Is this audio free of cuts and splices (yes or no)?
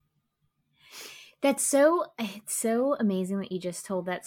yes